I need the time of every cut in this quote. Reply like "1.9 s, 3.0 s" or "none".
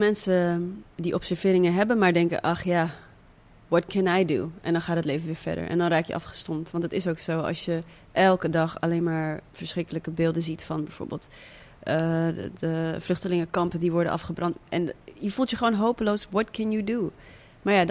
none